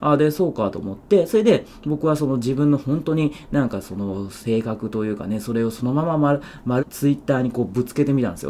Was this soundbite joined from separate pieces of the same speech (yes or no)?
yes